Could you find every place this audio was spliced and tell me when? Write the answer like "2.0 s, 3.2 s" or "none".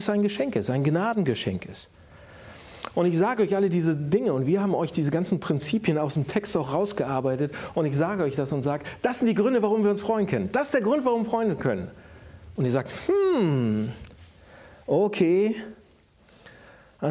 12.6 s

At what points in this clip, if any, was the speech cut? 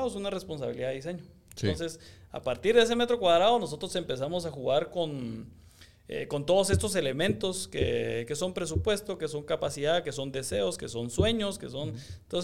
none

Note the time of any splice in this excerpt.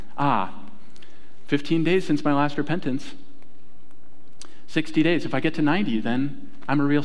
none

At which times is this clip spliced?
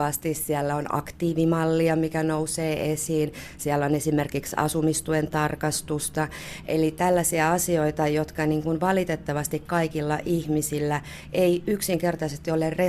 none

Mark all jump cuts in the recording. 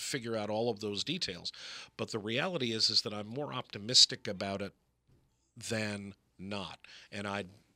none

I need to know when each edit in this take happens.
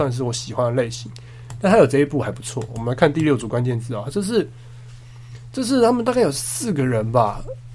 none

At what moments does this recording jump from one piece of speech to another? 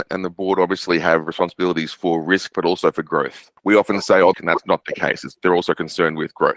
4.3 s

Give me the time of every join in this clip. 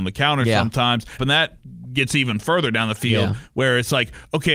1.2 s

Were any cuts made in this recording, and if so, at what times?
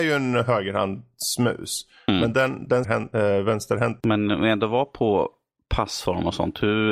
2.8 s, 4.0 s

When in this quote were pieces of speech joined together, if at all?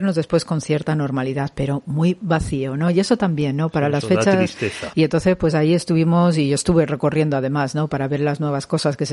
4.9 s

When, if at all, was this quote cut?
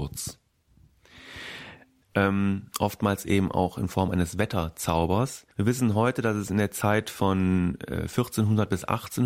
2.0 s, 5.5 s

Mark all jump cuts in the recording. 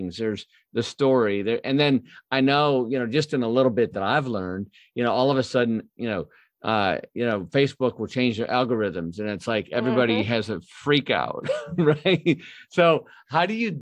none

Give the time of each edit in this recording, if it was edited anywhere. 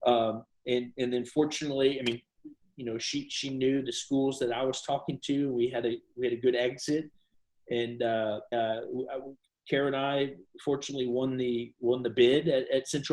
8.5 s

